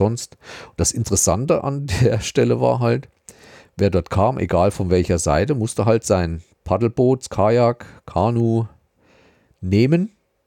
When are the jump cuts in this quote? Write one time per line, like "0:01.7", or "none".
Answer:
none